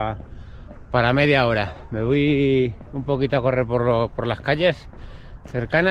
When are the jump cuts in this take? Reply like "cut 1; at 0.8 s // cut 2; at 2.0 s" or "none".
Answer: none

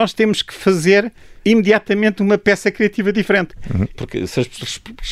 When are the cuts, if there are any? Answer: cut 1; at 3.9 s

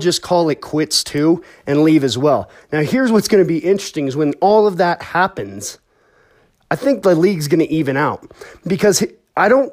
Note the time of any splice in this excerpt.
none

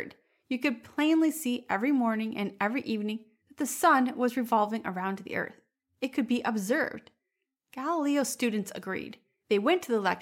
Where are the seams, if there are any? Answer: none

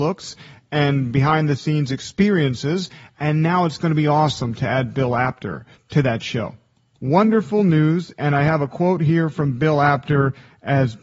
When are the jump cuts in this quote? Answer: none

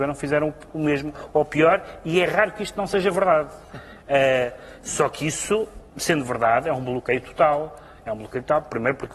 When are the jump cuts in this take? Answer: cut 1; at 5.9 s

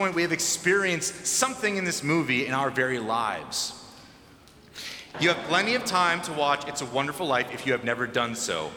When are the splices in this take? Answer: cut 1; at 5.1 s

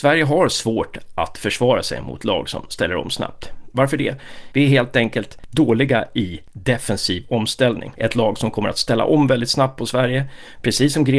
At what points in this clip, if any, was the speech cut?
cut 1; at 4.5 s // cut 2; at 8.0 s

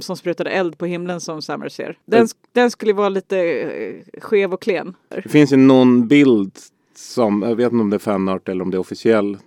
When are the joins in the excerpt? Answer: cut 1; at 5.1 s

